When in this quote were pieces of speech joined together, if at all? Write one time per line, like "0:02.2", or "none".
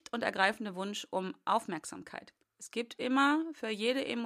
0:02.4